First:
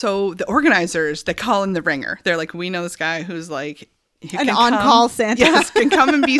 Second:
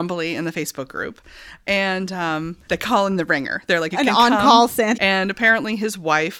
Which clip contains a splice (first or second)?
second